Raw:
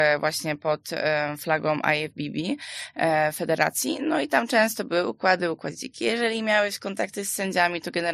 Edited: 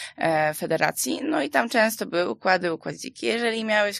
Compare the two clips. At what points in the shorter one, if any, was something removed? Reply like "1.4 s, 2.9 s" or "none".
none